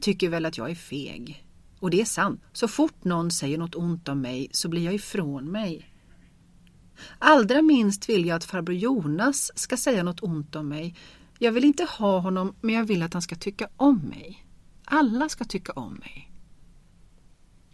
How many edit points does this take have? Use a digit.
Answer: 1